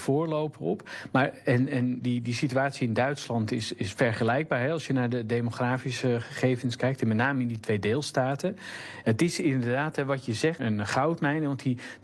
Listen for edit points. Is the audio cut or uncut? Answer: cut